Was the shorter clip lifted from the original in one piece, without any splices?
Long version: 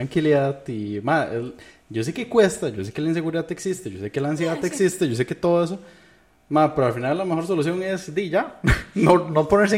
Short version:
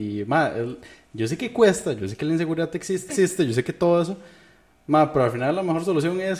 no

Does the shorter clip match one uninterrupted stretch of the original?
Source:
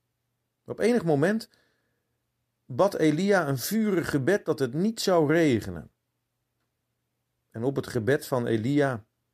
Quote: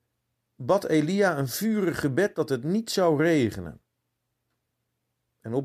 yes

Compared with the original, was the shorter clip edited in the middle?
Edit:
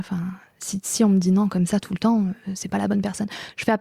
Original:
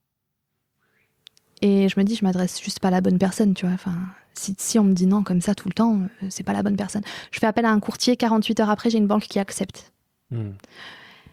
no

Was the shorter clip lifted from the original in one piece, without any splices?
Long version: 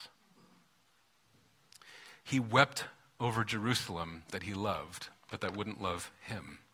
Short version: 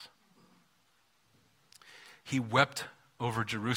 yes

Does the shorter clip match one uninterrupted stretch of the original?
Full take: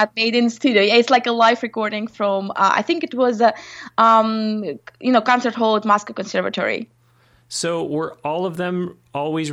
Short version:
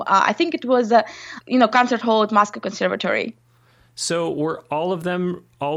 no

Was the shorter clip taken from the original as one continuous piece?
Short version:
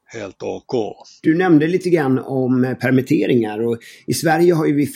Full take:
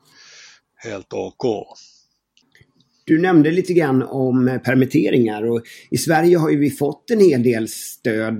no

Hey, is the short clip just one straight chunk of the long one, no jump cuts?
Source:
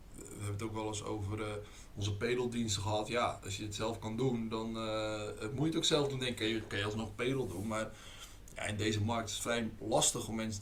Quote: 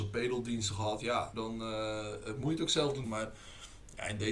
no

